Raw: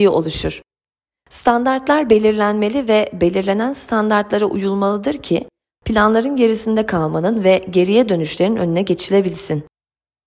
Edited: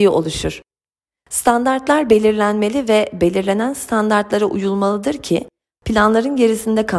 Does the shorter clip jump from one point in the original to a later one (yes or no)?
no